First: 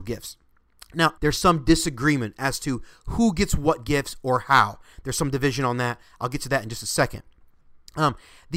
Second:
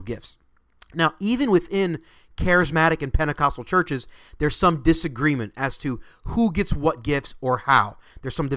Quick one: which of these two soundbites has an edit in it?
first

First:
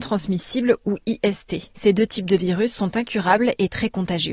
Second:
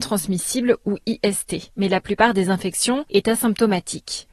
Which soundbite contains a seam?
second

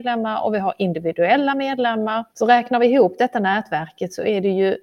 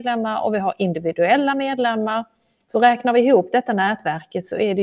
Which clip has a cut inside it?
first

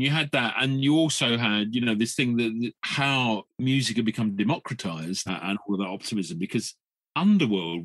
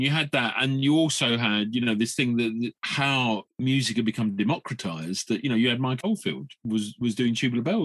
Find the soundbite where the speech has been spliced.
first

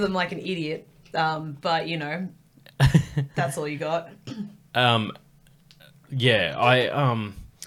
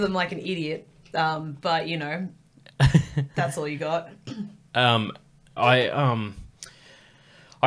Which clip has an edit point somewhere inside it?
second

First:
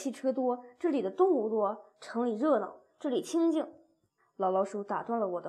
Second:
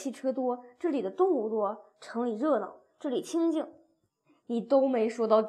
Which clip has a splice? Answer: first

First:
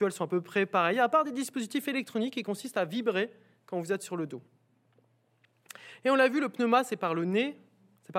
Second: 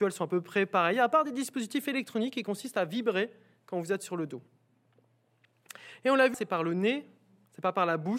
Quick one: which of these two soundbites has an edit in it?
second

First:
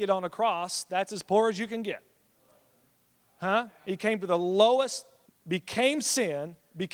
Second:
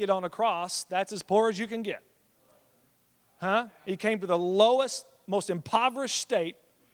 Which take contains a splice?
first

